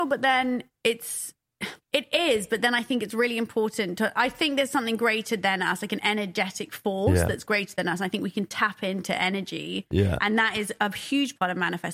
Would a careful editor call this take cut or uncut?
cut